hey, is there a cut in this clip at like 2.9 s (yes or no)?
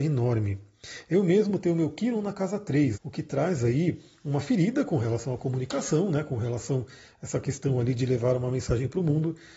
yes